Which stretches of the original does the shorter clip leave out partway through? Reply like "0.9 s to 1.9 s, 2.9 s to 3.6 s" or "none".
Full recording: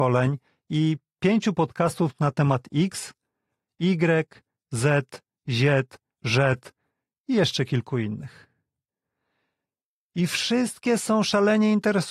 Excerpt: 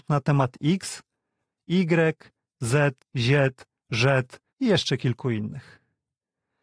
5.1 s to 5.3 s, 6.8 s to 7.2 s